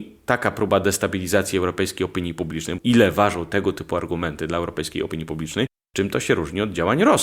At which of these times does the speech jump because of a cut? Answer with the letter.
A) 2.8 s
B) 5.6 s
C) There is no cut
A